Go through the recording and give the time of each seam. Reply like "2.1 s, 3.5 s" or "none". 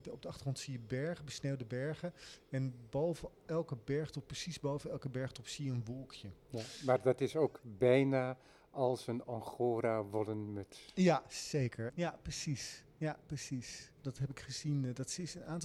11.9 s, 14.0 s